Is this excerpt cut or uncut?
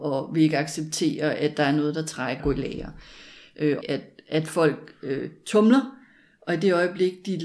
cut